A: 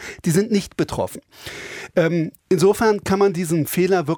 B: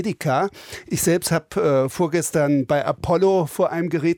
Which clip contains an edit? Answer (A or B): A